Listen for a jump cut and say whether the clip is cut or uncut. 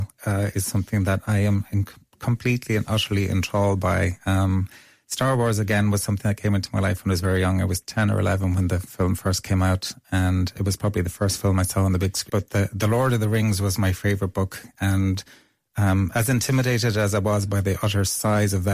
cut